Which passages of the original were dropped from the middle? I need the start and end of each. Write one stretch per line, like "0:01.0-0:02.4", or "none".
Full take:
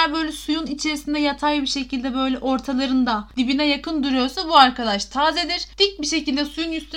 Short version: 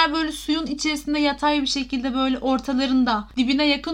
none